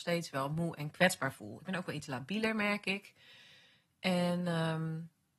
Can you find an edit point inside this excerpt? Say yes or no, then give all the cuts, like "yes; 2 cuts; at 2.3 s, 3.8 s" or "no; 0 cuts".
no; 0 cuts